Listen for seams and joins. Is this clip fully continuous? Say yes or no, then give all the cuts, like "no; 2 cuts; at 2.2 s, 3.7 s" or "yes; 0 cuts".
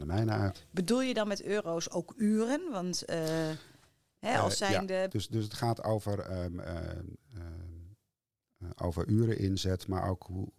no; 1 cut; at 5.1 s